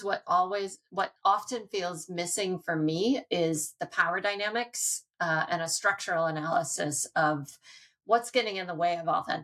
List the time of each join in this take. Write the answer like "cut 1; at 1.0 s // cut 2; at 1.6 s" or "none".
none